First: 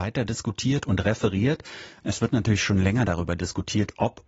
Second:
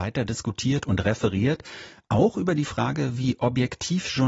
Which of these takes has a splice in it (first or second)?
first